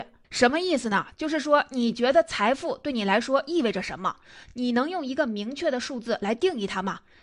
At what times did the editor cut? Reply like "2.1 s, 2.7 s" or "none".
none